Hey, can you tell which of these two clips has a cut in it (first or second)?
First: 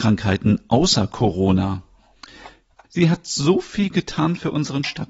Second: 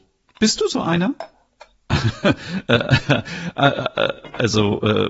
first